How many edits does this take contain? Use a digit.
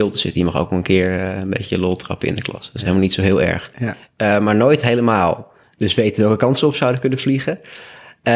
2